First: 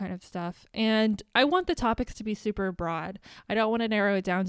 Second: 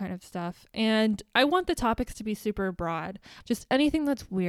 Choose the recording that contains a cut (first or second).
second